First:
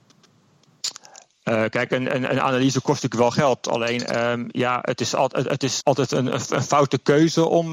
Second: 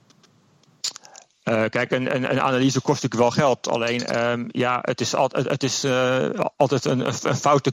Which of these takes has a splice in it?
first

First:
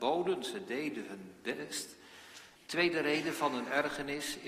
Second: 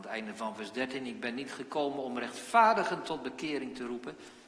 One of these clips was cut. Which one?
first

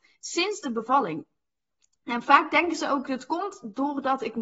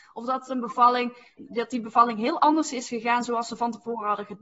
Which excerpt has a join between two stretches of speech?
second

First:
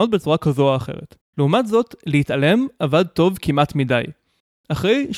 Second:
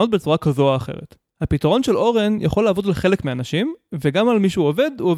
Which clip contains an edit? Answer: first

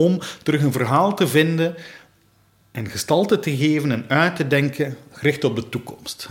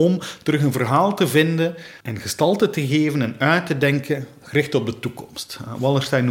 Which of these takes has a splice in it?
second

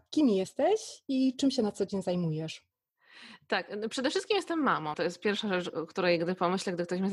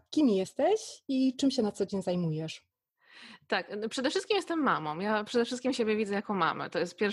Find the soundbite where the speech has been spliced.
first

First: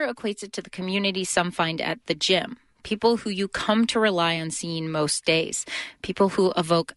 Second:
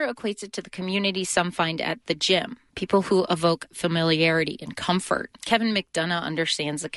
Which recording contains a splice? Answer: second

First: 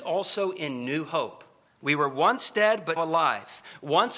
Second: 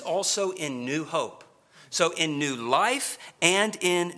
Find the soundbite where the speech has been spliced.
first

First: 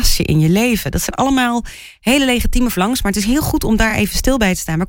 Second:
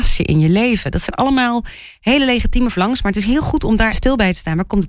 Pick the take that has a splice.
second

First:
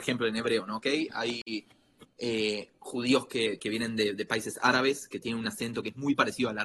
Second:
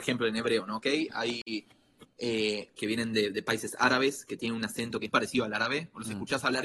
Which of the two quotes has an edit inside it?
second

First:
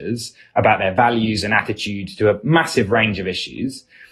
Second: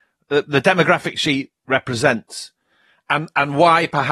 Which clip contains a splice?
second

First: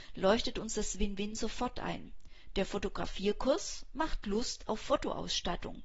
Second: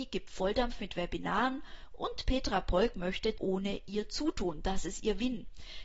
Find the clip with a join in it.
second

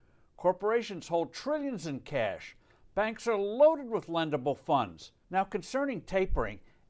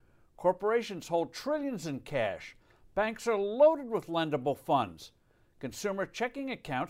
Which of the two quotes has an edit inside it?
first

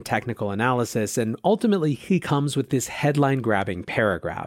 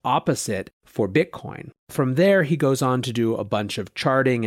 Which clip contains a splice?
second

